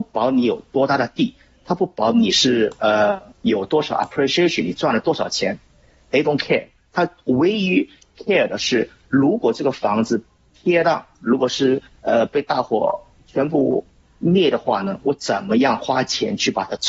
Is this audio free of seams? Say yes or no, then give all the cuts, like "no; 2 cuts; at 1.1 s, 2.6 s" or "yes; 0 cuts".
yes; 0 cuts